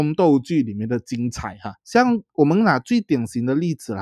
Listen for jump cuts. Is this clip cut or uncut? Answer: cut